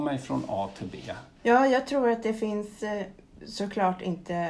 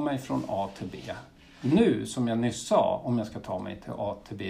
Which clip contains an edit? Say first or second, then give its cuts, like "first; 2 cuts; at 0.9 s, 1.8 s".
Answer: first; 1 cut; at 1.4 s